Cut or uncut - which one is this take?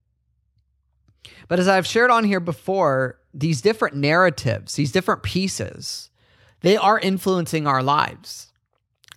uncut